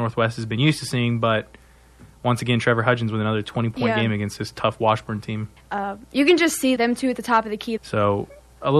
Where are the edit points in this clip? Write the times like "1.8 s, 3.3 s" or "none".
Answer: 5.6 s, 6.8 s, 7.8 s